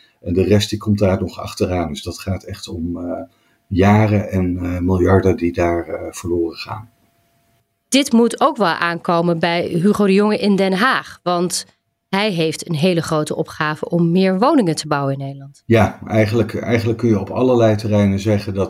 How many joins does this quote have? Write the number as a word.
zero